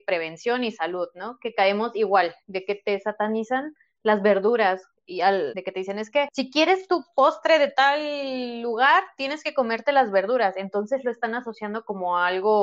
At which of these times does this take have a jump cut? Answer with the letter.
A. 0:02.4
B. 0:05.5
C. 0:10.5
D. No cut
B